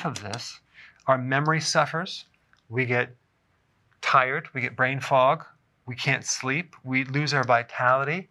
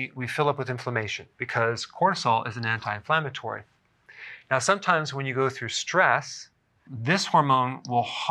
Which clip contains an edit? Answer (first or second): second